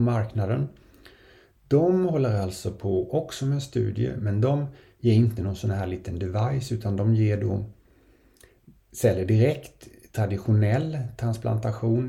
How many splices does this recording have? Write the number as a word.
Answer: zero